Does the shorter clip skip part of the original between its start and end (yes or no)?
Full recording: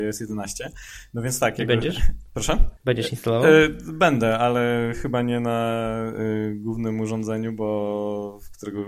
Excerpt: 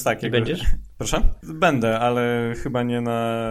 yes